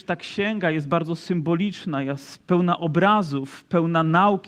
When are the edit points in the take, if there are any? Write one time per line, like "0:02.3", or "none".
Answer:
0:02.4

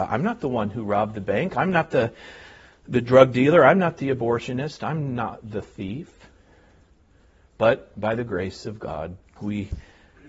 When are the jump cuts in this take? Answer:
0:07.5
0:09.4

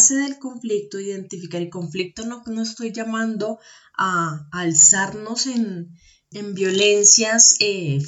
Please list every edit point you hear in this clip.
0:06.3

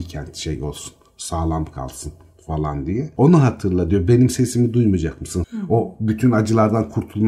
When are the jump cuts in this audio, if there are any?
0:05.4

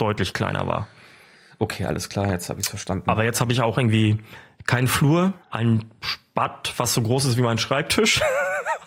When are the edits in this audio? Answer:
0:05.4

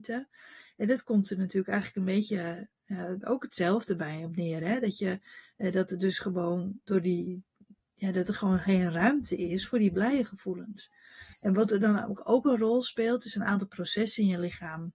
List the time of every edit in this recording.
0:03.2
0:11.3

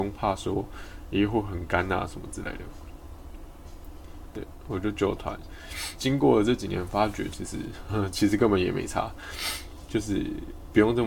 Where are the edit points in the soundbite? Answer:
0:04.3
0:06.0
0:07.3

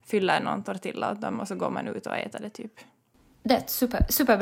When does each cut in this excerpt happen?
none

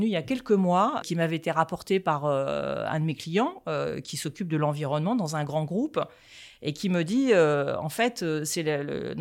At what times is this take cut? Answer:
0:01.0

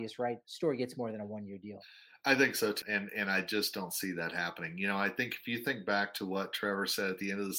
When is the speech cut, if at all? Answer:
0:02.8

